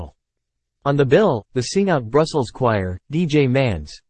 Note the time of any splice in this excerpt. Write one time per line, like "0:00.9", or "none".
0:01.5
0:03.0